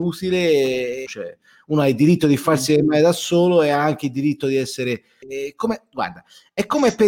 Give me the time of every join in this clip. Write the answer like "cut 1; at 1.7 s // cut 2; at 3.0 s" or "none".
cut 1; at 1.1 s // cut 2; at 5.2 s